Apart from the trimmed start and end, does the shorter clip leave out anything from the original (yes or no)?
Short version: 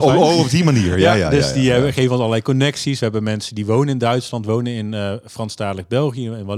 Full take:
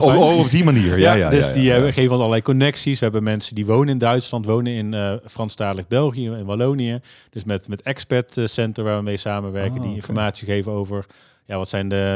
no